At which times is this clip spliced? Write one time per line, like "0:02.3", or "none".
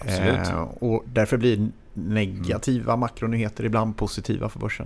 none

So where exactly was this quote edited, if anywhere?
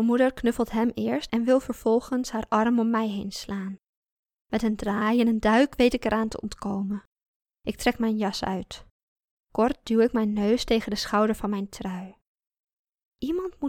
none

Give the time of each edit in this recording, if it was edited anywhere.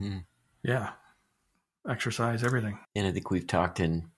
0:02.8

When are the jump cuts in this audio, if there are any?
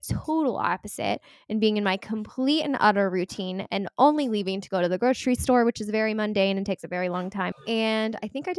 0:07.5

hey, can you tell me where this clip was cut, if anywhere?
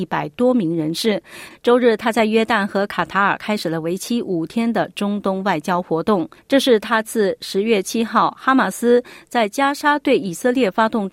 0:01.5

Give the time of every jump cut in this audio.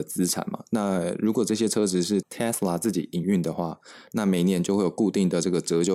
0:02.2

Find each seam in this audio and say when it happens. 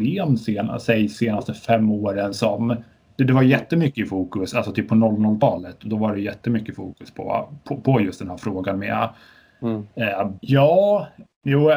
0:10.4

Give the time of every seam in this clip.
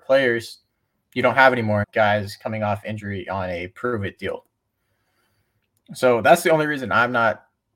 0:01.8

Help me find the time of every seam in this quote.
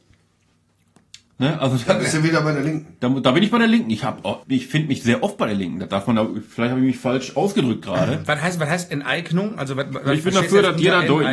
0:04.4

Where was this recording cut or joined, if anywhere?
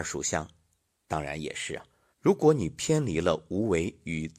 0:02.1

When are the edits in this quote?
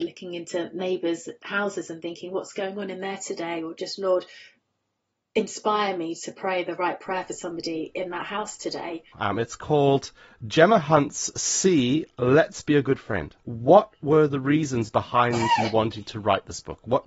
0:09.1
0:13.4

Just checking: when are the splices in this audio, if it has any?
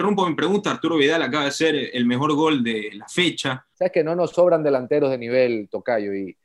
0:03.7

